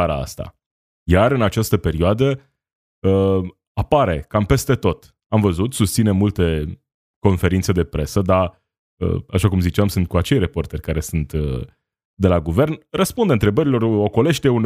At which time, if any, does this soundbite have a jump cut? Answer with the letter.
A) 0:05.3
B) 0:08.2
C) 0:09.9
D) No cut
D